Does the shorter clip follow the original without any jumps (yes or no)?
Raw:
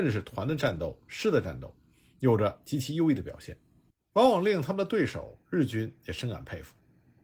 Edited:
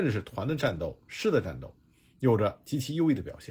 yes